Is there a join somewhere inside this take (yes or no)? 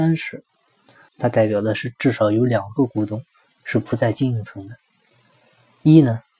yes